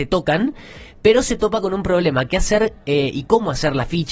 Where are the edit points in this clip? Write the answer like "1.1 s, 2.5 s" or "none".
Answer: none